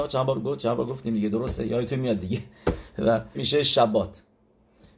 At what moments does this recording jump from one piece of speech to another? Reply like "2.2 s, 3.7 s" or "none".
3.3 s